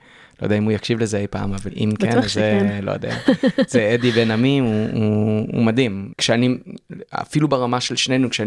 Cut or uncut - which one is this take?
cut